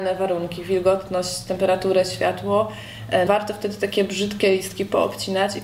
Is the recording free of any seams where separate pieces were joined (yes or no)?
no